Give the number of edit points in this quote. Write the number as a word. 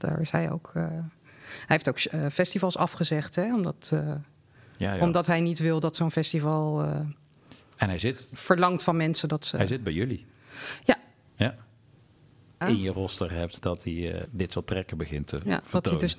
two